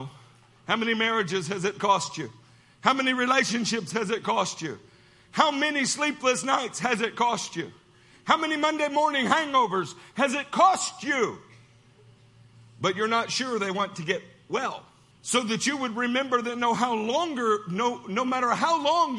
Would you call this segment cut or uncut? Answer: cut